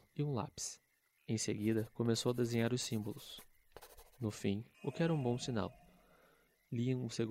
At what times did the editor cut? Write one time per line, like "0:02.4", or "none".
0:04.7